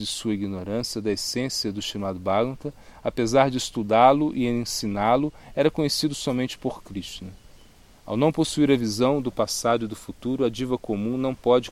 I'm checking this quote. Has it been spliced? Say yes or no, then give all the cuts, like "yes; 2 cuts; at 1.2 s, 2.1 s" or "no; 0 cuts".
no; 0 cuts